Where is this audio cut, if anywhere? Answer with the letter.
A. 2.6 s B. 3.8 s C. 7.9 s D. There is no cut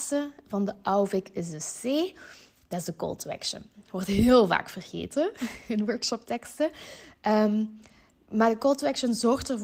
D